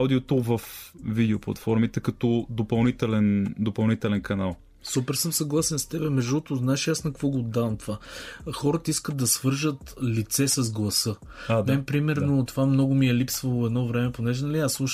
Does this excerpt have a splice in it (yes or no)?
no